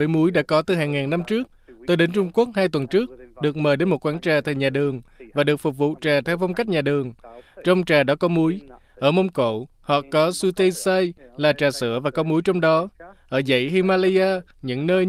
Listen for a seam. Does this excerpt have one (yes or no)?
no